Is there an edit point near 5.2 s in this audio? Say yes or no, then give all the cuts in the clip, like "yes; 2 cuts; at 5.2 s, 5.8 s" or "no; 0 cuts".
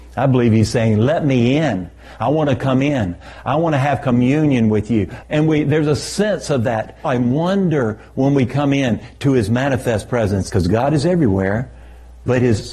yes; 3 cuts; at 5.2 s, 7.0 s, 10.5 s